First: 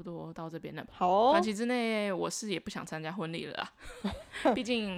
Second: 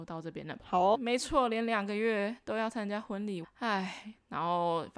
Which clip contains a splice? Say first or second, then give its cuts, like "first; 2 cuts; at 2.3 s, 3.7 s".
second; 2 cuts; at 0.9 s, 3.4 s